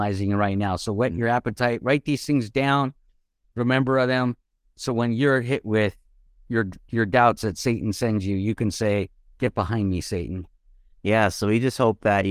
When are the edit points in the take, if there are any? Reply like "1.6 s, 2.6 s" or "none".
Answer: none